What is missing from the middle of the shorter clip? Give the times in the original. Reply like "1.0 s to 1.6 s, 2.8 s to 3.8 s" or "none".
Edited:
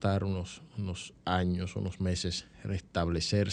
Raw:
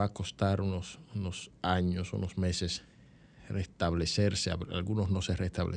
2.9 s to 3.4 s

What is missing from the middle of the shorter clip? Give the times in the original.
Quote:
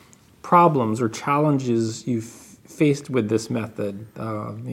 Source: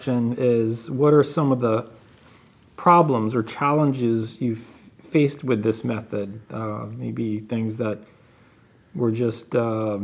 none

